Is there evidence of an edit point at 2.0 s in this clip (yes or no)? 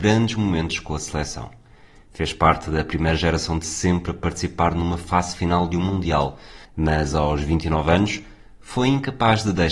no